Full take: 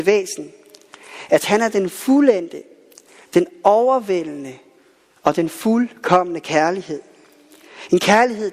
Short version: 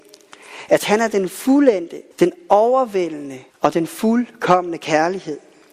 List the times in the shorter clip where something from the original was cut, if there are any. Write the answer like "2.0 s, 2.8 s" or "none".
2.1 s, 3.5 s